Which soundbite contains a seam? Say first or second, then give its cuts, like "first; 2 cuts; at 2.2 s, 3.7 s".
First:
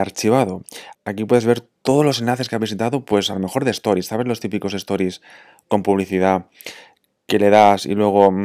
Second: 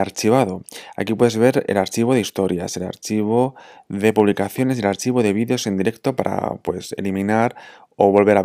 first; 1 cut; at 0.9 s